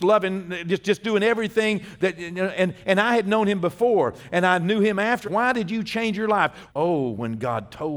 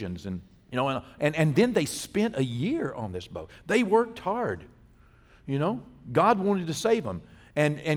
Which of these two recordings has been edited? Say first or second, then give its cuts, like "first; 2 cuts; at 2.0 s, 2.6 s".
first; 2 cuts; at 5.2 s, 6.7 s